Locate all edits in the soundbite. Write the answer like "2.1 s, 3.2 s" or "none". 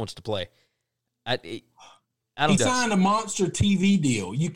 2.6 s